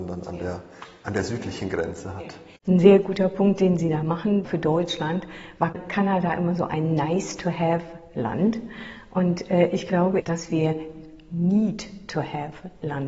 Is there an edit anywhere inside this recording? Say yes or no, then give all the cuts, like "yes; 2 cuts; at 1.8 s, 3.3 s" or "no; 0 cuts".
yes; 2 cuts; at 4.4 s, 10.2 s